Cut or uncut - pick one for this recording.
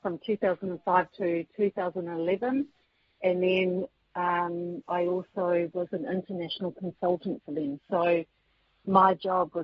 uncut